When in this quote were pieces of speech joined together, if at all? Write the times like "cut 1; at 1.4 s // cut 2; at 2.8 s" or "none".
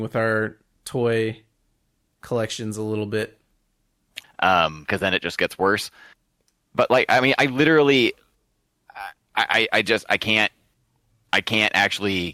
cut 1; at 4.2 s